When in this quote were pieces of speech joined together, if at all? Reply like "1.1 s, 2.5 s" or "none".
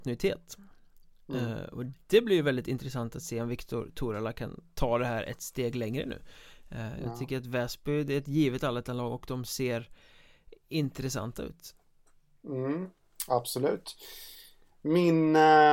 none

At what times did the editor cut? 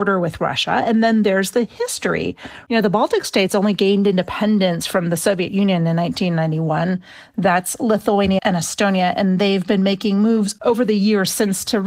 8.4 s

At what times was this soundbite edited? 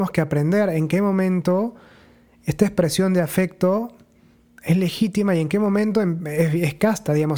none

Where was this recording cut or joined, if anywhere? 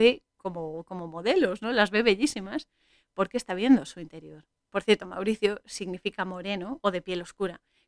4.7 s

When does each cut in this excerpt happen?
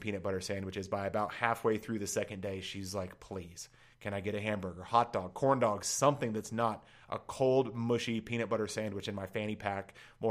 none

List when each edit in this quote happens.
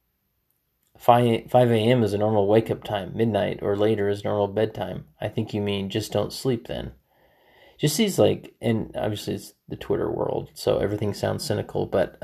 none

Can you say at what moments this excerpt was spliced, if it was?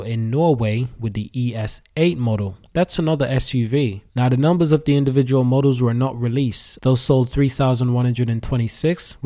4.1 s, 6.8 s

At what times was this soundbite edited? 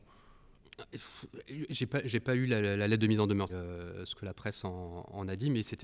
3.5 s

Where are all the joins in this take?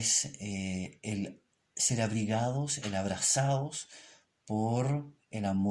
none

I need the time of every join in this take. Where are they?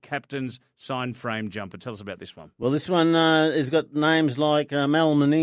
none

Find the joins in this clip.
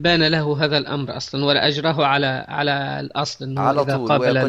none

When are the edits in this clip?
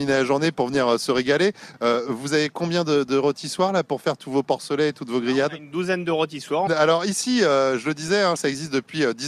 1.7 s, 6.7 s, 8.4 s

